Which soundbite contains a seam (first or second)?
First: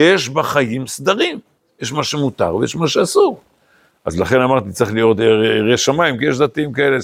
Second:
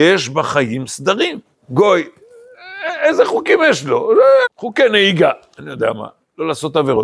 second